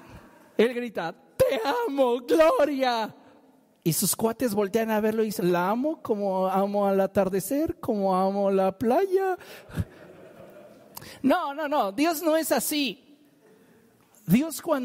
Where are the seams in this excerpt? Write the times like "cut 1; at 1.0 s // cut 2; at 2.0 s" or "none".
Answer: cut 1; at 5.4 s